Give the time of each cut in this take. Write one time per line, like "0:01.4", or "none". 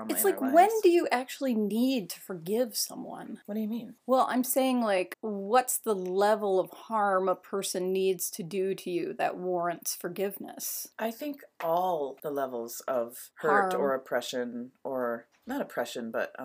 none